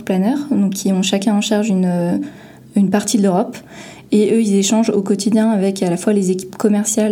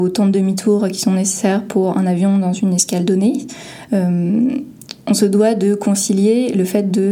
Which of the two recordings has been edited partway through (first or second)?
second